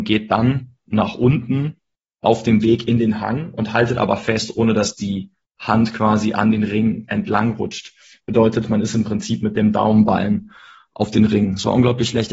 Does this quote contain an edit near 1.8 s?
no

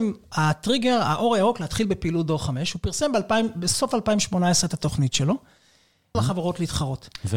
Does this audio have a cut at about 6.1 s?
yes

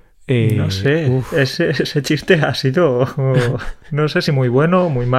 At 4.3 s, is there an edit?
no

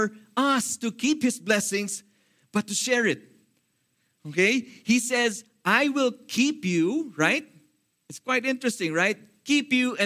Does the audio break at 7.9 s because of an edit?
yes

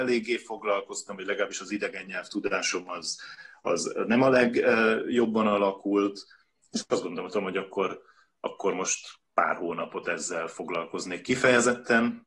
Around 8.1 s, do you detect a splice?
no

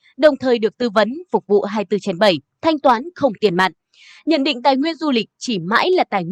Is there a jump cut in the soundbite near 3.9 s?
no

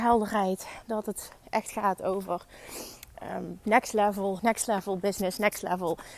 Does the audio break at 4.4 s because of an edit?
yes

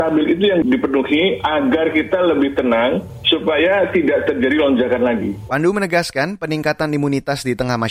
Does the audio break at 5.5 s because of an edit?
yes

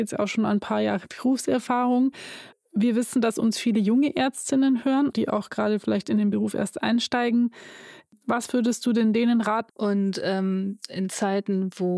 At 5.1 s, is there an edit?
yes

